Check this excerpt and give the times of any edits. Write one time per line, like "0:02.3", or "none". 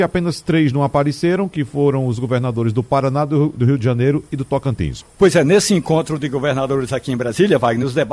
0:05.0